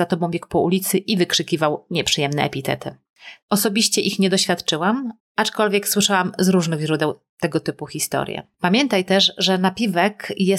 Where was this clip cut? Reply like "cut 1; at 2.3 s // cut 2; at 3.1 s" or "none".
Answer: cut 1; at 3.4 s // cut 2; at 8.5 s